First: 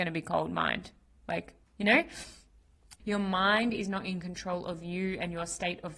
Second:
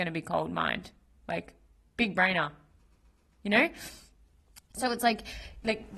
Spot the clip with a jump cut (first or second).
first